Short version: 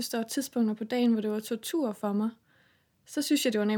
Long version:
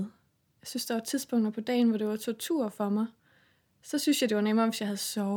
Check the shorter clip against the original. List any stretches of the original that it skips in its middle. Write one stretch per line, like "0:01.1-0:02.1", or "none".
none